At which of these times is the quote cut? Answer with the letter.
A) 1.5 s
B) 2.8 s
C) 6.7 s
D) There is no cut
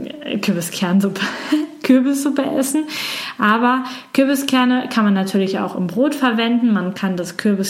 D